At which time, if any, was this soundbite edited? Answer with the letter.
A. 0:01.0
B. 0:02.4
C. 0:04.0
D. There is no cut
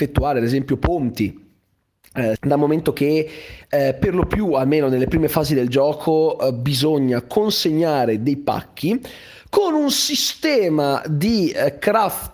B